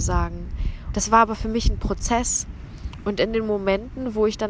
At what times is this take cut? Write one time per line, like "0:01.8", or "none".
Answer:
0:00.9